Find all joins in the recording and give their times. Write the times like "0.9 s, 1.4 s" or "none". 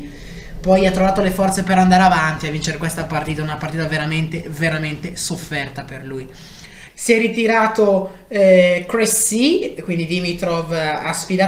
6.9 s